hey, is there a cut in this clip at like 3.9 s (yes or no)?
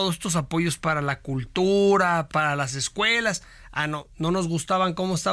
no